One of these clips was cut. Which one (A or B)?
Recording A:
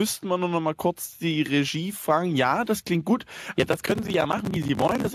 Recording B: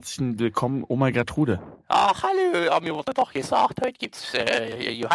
A